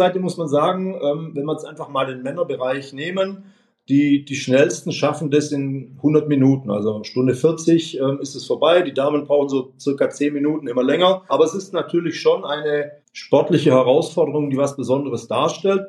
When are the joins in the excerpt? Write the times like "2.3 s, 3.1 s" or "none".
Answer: 11.3 s, 13.0 s